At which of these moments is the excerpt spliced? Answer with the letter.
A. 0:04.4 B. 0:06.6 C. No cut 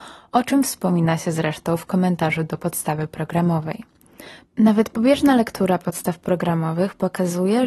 A